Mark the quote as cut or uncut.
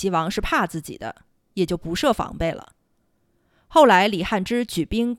uncut